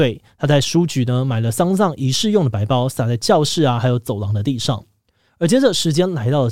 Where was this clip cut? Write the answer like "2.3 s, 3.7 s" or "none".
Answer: 5.2 s